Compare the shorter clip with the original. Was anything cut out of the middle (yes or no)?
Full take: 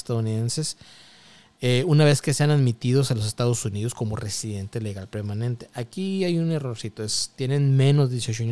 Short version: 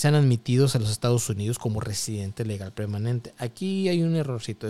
no